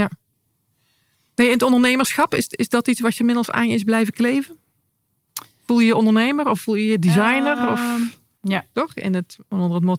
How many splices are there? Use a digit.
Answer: 1